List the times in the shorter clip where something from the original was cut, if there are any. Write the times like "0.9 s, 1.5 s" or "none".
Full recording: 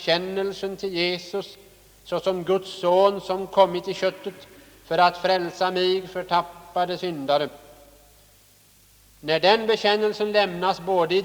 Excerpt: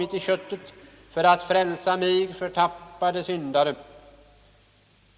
none